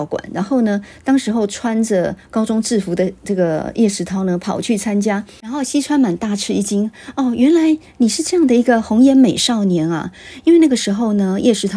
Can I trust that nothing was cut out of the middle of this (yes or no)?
yes